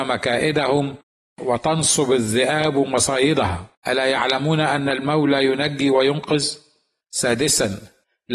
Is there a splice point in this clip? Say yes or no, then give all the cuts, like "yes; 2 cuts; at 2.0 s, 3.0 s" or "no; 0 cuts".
yes; 2 cuts; at 3.7 s, 7.0 s